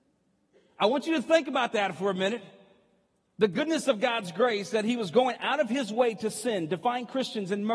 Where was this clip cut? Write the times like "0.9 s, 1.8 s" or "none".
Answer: none